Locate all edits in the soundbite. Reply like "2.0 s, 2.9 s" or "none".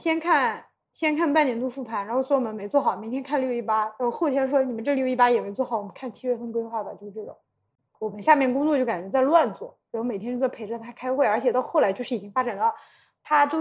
none